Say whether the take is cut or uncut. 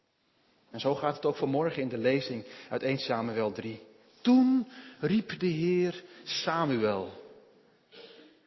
uncut